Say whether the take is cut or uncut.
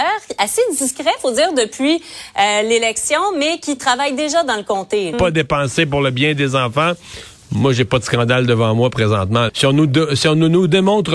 cut